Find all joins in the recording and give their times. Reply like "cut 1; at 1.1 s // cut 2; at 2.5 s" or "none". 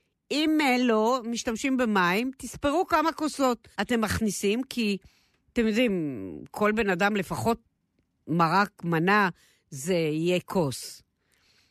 cut 1; at 3.7 s